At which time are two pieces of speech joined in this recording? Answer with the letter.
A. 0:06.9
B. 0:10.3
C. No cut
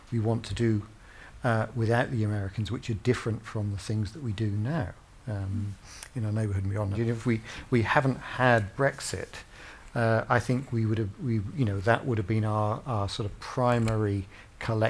A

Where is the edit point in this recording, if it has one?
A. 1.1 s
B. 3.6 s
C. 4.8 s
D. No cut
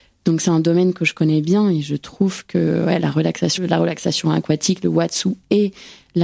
B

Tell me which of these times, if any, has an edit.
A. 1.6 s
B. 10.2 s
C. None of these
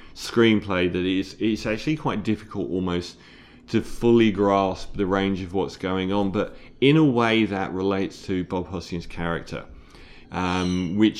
B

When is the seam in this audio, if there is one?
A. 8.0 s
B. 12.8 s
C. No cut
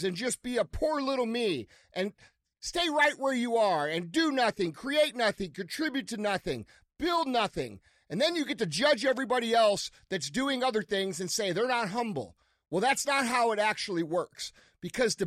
C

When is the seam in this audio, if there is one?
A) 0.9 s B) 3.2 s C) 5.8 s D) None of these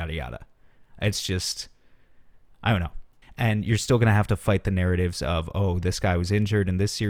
B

